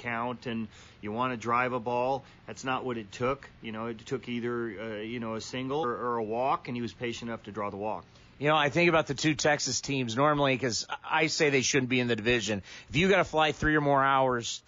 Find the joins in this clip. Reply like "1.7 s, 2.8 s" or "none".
5.8 s